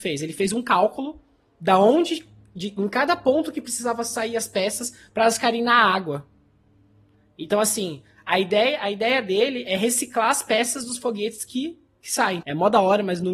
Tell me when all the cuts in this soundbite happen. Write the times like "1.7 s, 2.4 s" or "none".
12.4 s